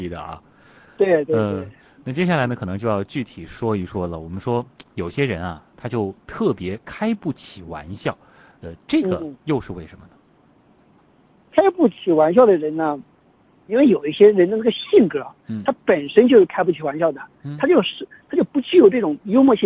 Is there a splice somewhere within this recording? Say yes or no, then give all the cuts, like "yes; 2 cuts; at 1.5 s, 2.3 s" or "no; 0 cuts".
no; 0 cuts